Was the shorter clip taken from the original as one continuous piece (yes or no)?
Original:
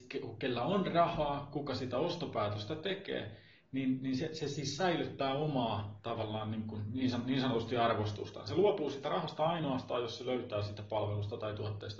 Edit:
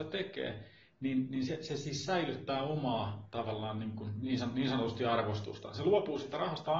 yes